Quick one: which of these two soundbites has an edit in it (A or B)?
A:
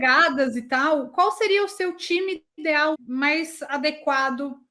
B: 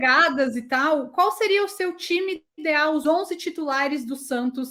A